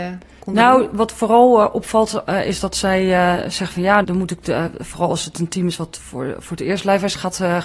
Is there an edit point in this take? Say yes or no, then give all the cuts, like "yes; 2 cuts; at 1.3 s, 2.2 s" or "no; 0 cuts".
yes; 1 cut; at 4.0 s